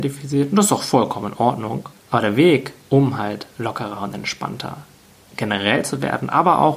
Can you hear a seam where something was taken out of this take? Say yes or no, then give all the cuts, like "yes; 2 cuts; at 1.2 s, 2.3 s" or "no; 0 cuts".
no; 0 cuts